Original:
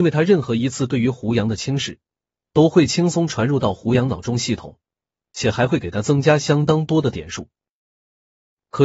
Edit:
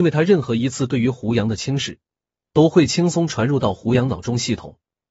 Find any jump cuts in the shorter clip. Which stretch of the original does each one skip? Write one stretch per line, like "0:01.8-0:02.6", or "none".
none